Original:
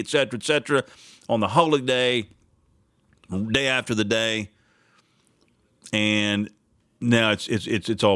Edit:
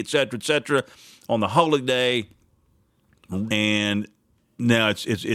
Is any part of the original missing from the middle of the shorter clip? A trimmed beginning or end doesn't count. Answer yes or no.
yes